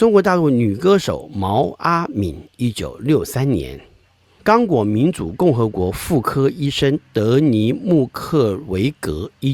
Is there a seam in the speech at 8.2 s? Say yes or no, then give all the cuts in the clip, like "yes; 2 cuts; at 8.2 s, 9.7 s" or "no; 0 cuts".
no; 1 cut; at 4.4 s